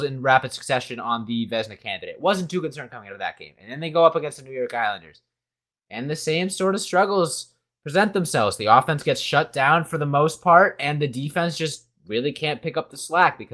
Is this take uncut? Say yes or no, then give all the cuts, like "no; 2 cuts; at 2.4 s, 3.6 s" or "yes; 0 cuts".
yes; 0 cuts